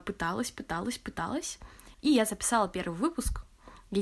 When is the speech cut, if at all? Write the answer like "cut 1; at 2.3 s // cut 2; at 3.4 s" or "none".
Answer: cut 1; at 1.9 s